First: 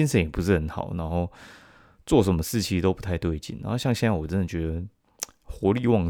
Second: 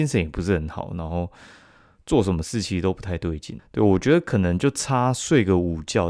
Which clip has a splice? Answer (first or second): second